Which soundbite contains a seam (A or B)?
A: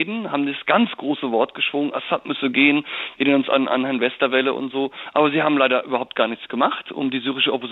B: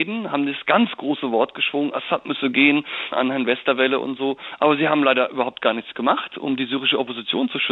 B